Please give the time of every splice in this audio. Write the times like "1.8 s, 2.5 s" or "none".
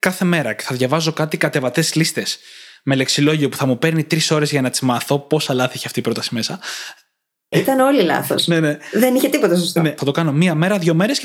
7.5 s, 10.0 s